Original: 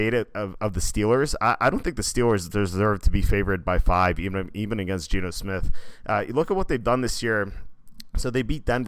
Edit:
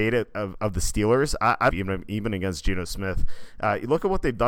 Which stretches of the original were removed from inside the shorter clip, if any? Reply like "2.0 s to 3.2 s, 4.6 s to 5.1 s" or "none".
1.7 s to 4.2 s